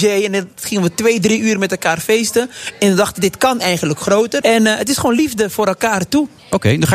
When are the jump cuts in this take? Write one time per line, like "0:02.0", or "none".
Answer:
0:04.4